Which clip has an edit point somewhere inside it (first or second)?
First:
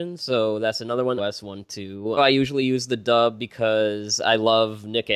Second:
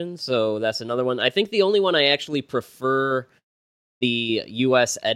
first